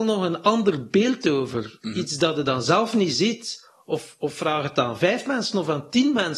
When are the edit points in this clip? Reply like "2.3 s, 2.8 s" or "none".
none